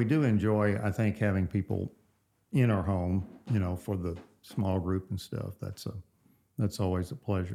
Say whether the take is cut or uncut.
uncut